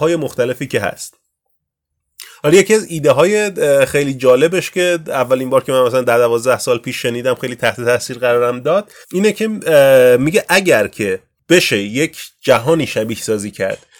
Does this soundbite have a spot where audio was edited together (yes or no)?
yes